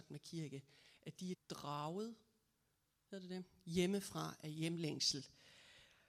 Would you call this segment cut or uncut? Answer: cut